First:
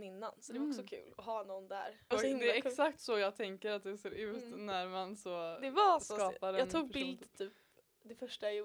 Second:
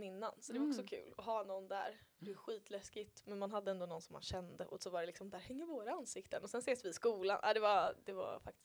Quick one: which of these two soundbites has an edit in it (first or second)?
first